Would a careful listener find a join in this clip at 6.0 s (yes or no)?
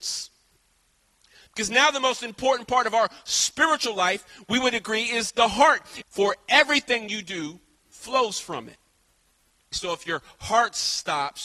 yes